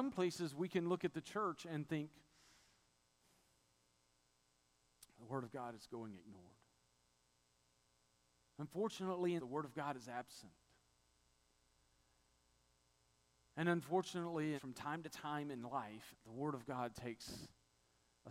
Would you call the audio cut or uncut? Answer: cut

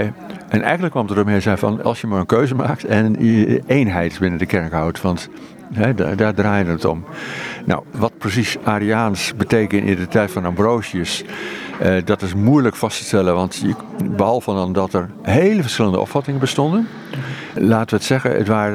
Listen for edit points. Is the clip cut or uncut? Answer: cut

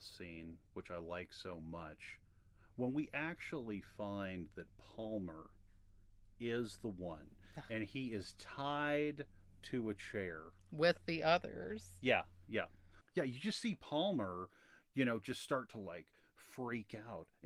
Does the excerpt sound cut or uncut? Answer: uncut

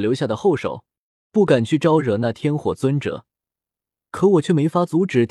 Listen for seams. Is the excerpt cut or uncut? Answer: cut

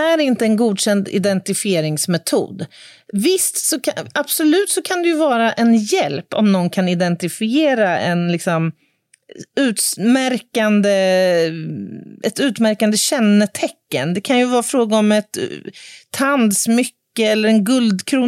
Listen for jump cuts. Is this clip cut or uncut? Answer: uncut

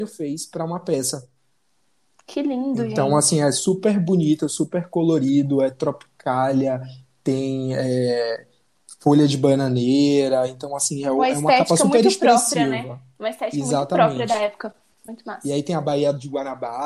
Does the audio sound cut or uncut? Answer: uncut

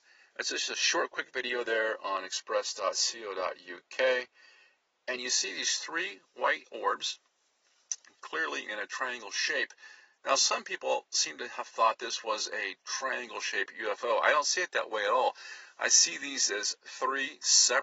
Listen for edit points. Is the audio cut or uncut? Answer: uncut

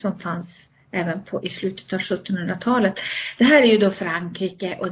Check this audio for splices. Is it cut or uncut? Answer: uncut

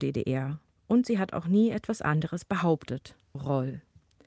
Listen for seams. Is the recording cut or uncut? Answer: cut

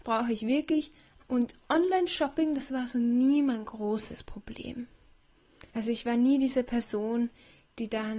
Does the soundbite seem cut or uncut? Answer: cut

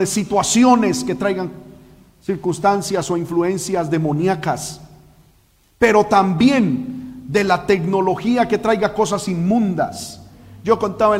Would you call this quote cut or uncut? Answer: uncut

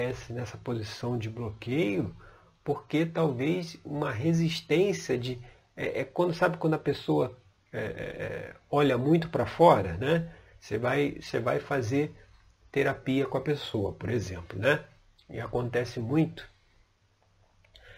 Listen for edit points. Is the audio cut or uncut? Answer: uncut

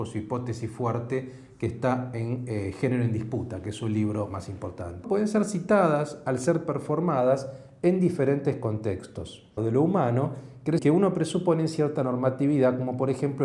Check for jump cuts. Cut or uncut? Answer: cut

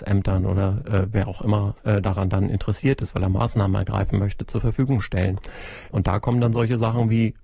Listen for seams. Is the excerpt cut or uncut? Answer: uncut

